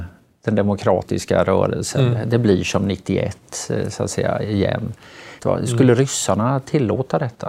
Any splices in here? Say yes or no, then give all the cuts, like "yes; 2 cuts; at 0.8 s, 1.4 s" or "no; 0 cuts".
yes; 1 cut; at 5.4 s